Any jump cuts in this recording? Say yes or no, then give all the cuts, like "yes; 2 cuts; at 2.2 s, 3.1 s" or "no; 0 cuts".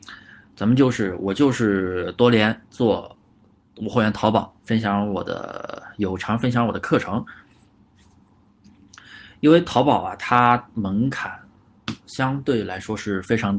yes; 1 cut; at 4.6 s